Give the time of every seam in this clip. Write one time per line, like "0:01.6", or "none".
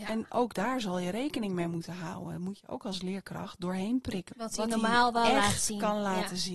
0:04.3